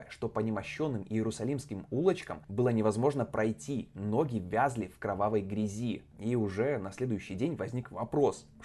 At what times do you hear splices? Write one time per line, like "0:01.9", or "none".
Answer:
0:06.1